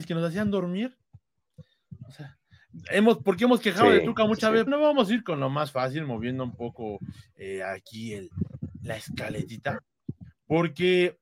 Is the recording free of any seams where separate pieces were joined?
no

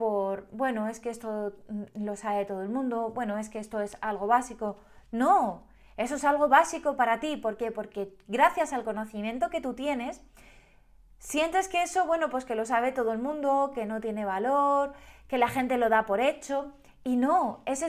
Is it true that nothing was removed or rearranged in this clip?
yes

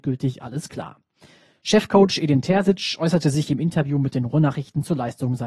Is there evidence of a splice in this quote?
no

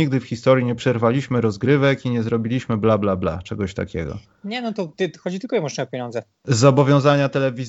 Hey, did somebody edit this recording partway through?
no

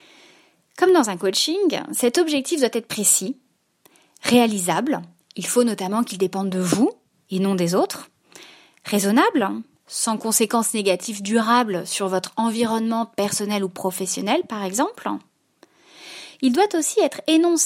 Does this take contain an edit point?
no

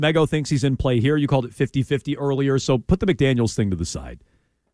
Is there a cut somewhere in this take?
no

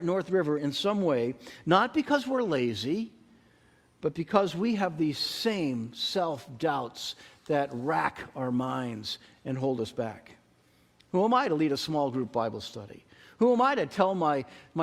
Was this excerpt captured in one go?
yes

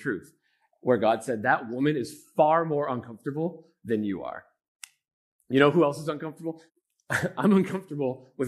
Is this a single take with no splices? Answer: no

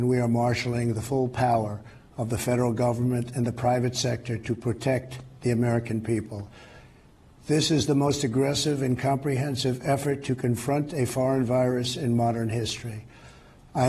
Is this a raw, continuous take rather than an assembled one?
yes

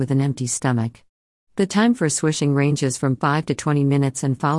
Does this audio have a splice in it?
no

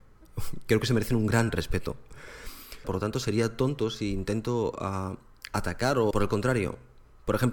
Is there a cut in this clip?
yes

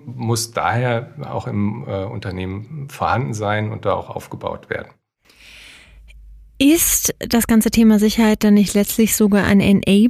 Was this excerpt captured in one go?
yes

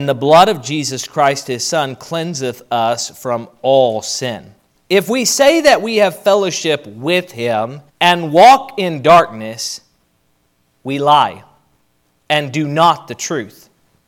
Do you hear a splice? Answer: yes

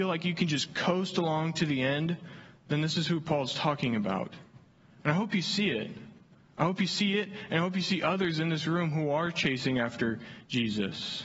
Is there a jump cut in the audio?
no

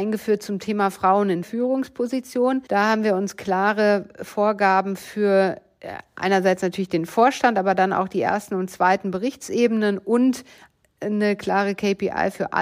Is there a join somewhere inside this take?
yes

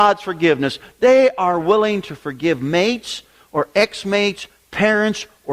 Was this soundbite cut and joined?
no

